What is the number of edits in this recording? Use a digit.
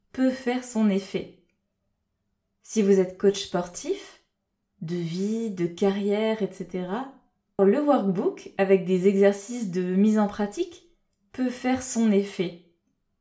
1